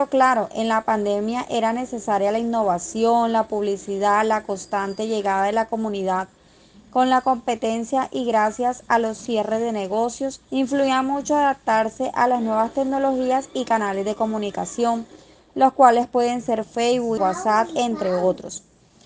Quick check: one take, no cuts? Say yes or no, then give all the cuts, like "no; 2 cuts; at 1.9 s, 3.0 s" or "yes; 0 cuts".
no; 2 cuts; at 10.4 s, 17.2 s